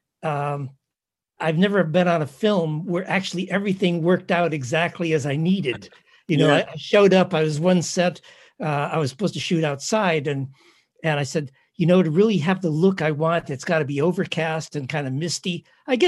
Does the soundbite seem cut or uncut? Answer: uncut